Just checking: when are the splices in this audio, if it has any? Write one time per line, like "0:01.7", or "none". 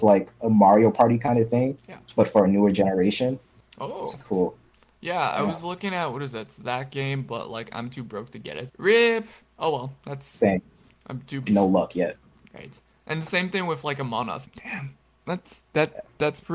0:08.7
0:11.5
0:14.5

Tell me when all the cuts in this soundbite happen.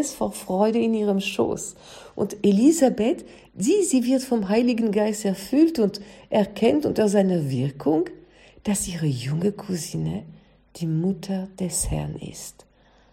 none

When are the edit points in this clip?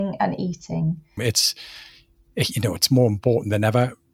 0:01.2

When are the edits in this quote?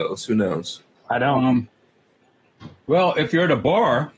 0:00.9

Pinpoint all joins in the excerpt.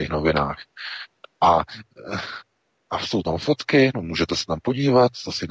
none

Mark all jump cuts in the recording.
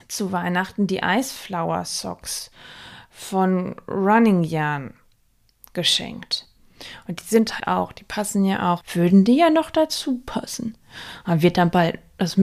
0:07.6
0:08.8

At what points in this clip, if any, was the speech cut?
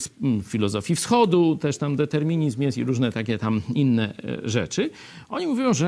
none

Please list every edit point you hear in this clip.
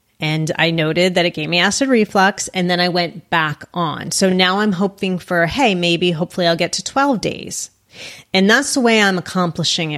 none

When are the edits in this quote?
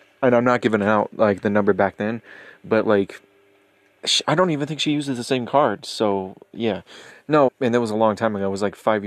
0:07.5

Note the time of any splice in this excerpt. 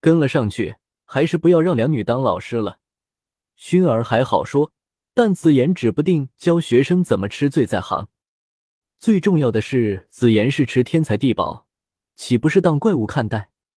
0:12.0

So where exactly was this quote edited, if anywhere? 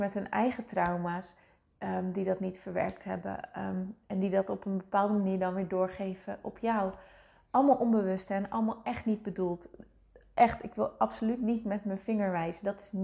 none

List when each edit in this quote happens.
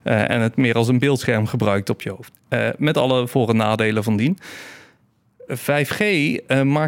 0:02.3

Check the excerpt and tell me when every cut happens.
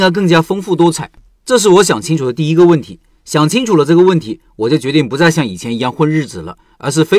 0:01.3

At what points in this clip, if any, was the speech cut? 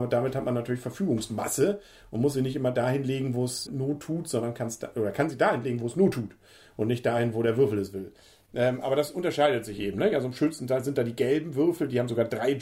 0:03.7

